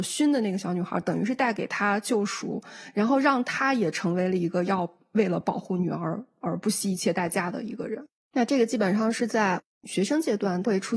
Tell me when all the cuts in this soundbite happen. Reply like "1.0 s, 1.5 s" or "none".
8.2 s